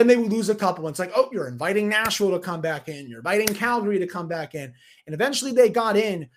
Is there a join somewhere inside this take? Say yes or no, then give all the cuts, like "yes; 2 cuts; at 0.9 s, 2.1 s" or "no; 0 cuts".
no; 0 cuts